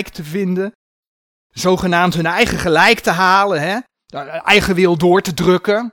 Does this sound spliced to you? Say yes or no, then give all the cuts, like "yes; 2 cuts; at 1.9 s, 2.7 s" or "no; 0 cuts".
no; 0 cuts